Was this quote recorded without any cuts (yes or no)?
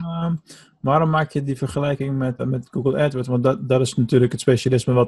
no